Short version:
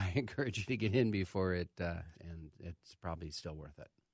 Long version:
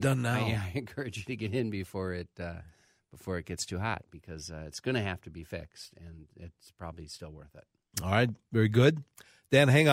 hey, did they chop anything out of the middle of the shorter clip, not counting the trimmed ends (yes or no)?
yes